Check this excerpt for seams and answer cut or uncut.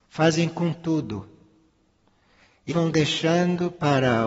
cut